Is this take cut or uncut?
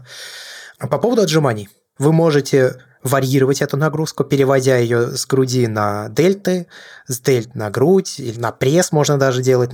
cut